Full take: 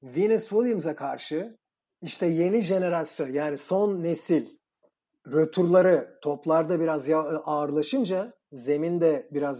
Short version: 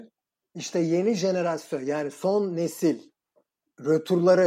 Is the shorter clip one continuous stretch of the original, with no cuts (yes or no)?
yes